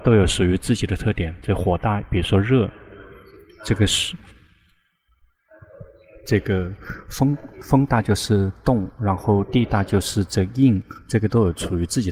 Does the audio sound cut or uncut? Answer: uncut